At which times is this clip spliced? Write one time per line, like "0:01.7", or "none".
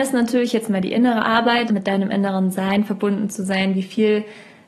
0:01.7